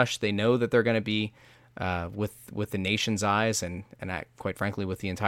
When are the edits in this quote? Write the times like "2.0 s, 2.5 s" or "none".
none